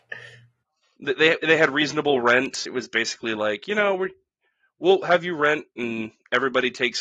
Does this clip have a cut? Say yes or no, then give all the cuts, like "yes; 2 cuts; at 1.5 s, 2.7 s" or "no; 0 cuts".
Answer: no; 0 cuts